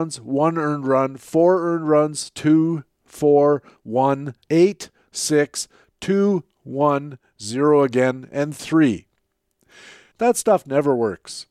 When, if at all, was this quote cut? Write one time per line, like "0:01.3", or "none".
0:04.4
0:10.1